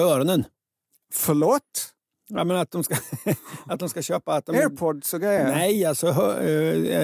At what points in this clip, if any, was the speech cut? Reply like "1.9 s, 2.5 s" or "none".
none